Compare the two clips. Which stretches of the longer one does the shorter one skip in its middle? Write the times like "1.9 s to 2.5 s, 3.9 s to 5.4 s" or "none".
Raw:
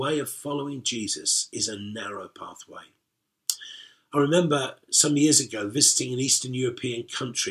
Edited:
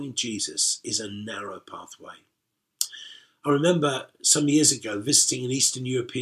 none